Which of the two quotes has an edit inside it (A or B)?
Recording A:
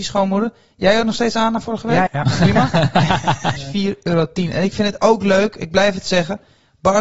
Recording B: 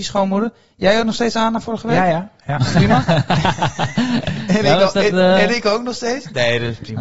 A